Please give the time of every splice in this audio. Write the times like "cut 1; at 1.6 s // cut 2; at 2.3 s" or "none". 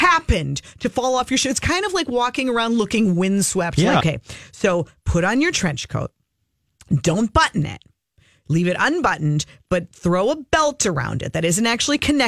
cut 1; at 4.0 s